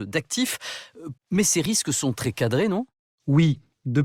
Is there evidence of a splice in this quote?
yes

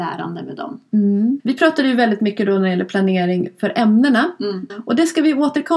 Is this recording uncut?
no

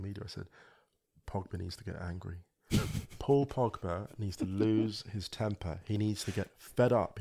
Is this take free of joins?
yes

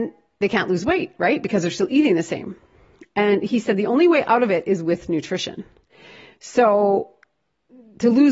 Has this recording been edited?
no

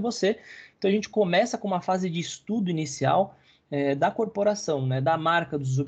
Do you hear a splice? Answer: no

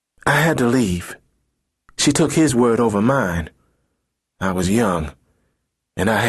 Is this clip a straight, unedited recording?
yes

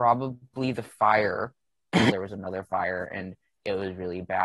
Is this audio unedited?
no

